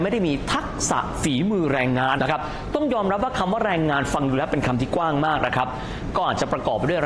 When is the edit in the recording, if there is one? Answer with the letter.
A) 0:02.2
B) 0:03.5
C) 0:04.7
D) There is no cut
A